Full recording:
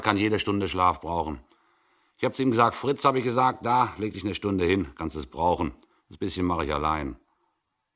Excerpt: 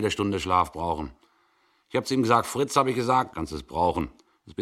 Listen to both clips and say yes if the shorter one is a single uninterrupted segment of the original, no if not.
no